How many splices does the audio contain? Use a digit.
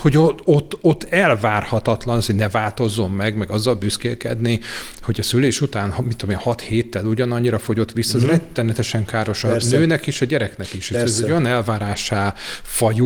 0